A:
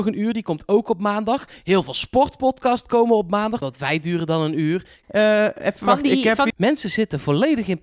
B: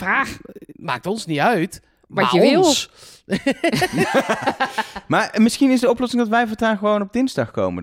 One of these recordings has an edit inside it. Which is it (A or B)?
A